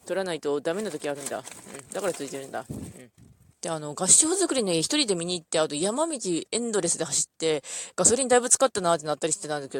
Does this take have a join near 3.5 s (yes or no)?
yes